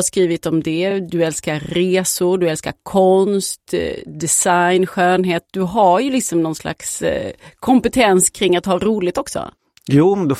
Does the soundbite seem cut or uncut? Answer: uncut